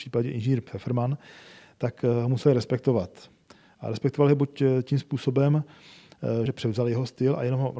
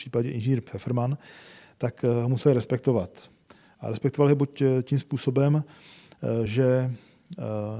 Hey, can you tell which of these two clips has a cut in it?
first; 1 cut; at 6.5 s

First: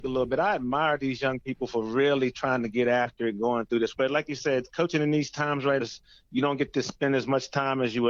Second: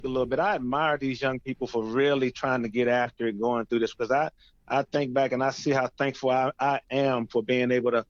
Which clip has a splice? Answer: first; 2 cuts; at 3.9 s, 5.8 s

